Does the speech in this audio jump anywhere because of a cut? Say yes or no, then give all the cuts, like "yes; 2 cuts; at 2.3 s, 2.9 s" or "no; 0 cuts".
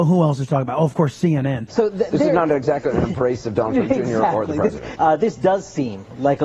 yes; 2 cuts; at 1.7 s, 5.0 s